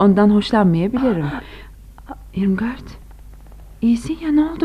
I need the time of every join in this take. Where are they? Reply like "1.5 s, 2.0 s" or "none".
none

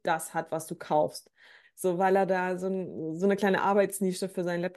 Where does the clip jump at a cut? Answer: 1.6 s

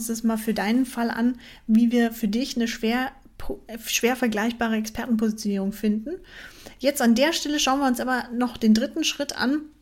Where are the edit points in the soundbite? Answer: none

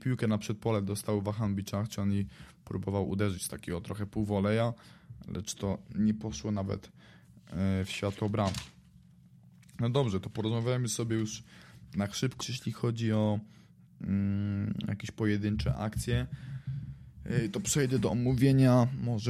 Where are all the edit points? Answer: 12.4 s

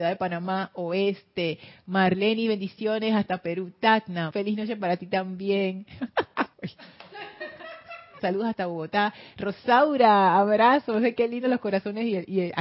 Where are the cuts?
4.3 s, 6.5 s, 8.2 s

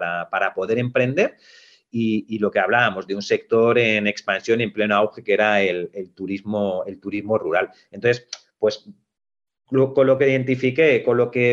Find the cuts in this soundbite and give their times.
none

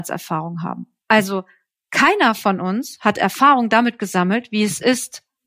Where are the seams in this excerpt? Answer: 1.0 s

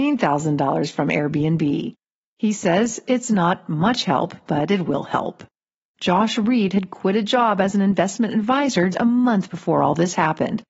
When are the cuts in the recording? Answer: 5.8 s, 8.9 s

